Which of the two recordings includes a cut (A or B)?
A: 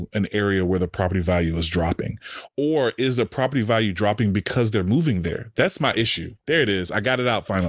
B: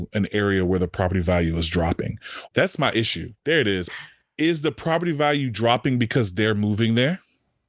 B